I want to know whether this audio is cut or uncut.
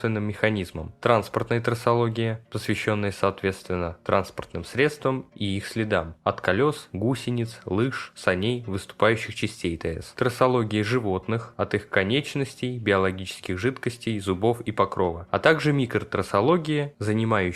uncut